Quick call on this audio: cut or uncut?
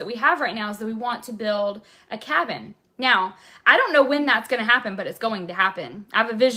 uncut